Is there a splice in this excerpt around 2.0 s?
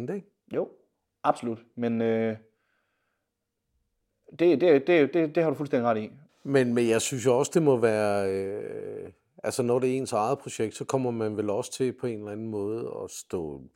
no; 1 cut; at 6.3 s

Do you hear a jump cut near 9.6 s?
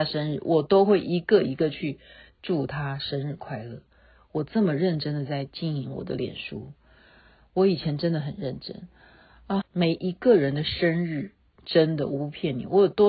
yes; 1 cut; at 9.6 s

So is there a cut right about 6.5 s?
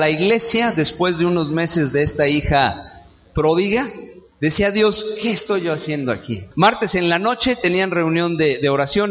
yes; 1 cut; at 6.5 s

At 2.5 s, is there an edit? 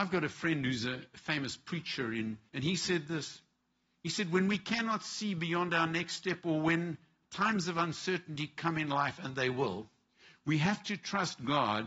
yes; 1 cut; at 2.5 s

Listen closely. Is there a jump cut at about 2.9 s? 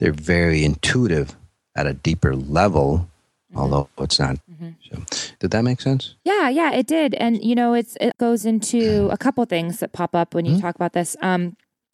no; 3 cuts; at 4.4 s, 6.2 s, 8.1 s

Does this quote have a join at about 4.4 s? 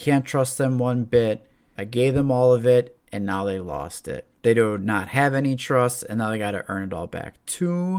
yes; 2 cuts; at 1.8 s, 4.4 s

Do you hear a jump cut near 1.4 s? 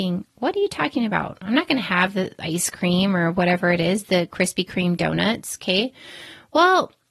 no; 0 cuts

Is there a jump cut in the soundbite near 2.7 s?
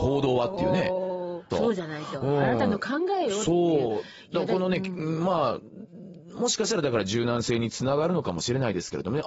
no; 1 cut; at 1.5 s

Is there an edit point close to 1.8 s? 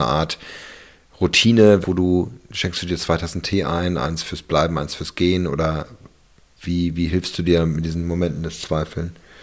yes; 1 cut; at 1.8 s

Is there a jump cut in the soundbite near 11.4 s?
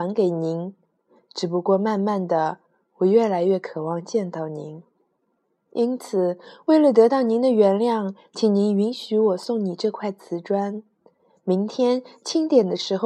no; 0 cuts

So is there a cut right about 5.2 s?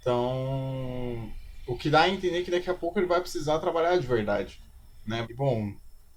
yes; 1 cut; at 5.2 s

